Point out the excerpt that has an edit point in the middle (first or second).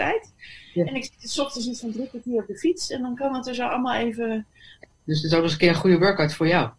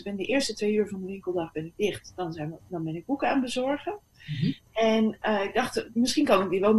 first